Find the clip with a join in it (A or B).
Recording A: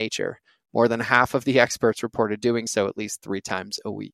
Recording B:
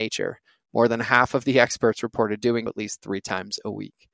B